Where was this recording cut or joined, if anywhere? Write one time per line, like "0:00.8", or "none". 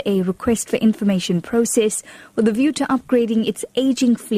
none